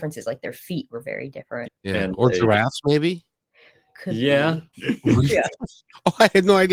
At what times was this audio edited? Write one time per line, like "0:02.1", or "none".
0:01.6
0:04.7